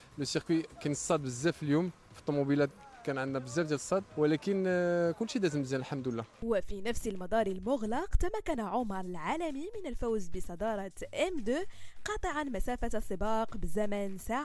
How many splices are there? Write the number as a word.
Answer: one